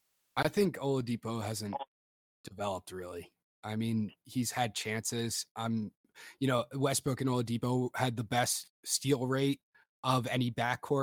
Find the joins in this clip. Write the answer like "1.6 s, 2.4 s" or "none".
none